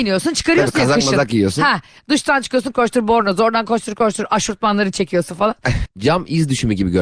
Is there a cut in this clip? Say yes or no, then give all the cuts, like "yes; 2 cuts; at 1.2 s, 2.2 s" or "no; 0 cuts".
yes; 2 cuts; at 2.7 s, 5.9 s